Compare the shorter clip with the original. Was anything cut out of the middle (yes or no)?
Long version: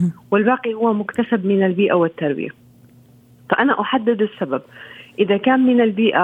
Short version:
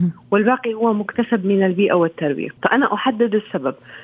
yes